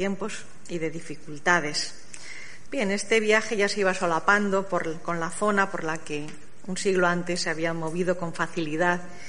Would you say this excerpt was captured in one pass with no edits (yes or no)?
no